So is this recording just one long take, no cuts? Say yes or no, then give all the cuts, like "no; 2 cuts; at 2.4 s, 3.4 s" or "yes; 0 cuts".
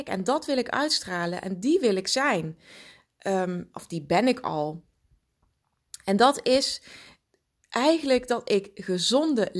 yes; 0 cuts